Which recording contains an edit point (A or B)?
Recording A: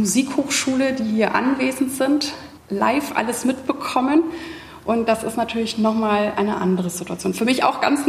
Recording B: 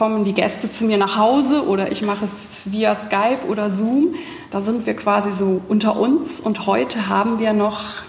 A